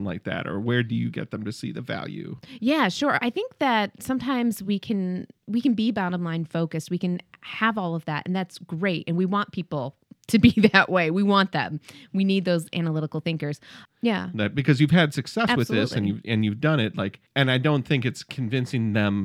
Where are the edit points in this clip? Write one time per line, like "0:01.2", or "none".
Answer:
0:13.8
0:17.3